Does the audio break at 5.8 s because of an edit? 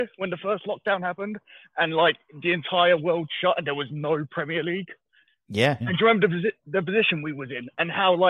yes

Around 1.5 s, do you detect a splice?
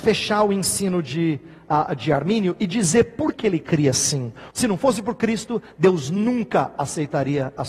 no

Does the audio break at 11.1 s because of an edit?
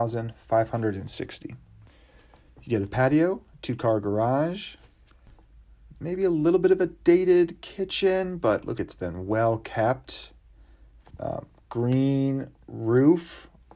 yes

